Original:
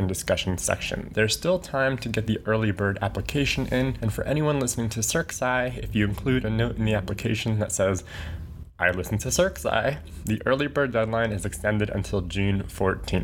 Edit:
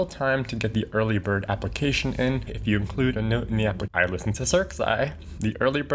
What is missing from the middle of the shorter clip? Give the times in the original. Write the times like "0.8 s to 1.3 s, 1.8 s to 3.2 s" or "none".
4.0 s to 5.7 s, 7.2 s to 8.7 s